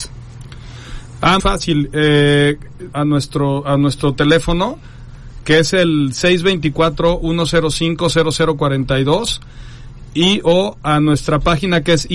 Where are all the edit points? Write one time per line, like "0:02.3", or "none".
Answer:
0:01.4
0:02.9